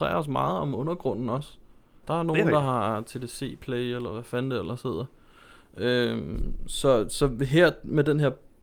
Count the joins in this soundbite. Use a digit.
1